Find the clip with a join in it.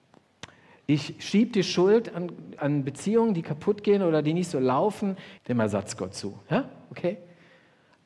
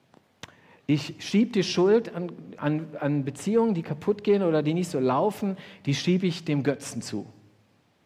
first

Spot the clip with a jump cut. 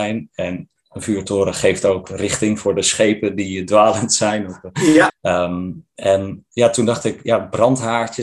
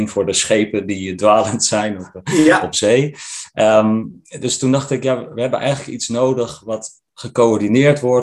first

